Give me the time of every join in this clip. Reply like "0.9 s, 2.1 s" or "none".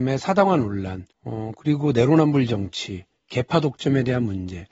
1.1 s